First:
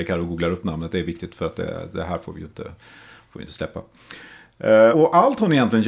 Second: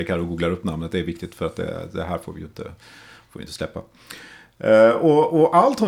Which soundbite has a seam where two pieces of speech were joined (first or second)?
first